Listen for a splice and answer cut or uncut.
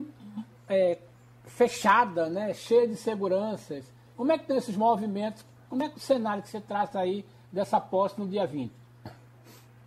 uncut